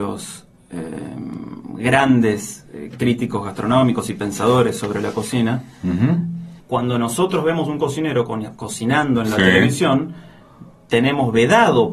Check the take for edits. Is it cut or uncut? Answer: cut